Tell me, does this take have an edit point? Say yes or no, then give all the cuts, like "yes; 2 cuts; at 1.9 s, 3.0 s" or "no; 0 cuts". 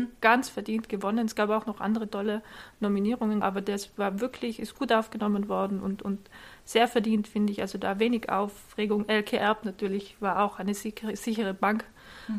yes; 1 cut; at 3.4 s